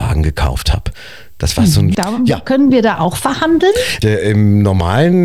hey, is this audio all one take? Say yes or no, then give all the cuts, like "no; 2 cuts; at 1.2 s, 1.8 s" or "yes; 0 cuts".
no; 2 cuts; at 1.9 s, 4.0 s